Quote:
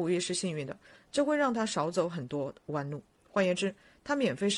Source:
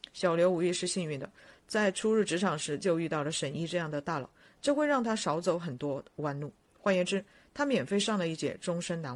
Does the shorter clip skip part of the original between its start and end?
yes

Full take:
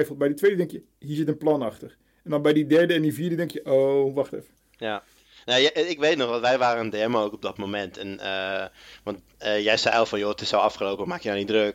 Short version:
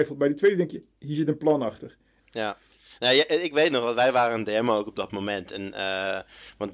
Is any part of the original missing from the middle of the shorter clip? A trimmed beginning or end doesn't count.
yes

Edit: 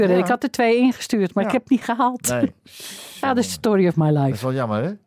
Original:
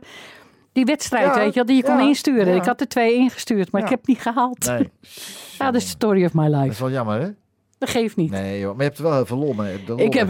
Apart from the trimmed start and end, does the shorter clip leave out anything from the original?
no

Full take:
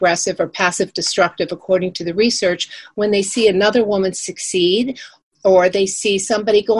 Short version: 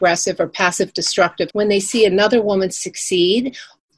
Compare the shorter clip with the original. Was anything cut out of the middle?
yes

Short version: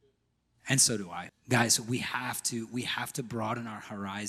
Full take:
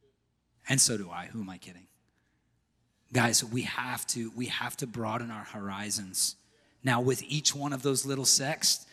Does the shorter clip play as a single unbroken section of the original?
no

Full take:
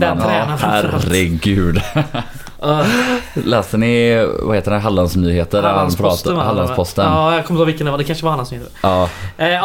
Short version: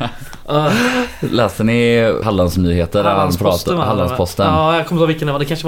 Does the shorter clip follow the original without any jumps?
no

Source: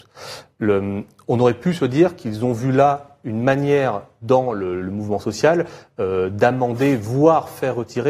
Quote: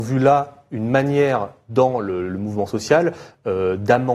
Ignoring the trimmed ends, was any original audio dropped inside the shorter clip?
no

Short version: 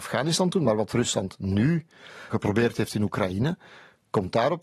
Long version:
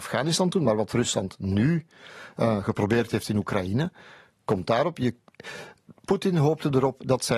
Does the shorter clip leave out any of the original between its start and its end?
yes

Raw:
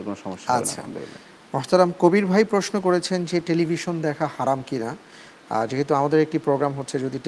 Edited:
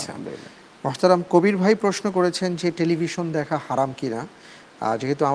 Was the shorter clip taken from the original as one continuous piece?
yes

